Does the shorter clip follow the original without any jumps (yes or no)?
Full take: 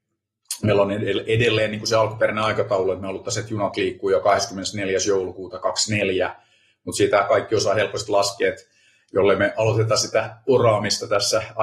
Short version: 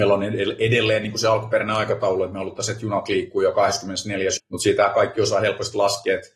no